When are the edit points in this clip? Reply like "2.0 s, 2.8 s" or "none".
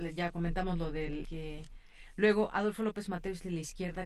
1.2 s

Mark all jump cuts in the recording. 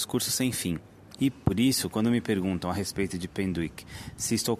1.2 s

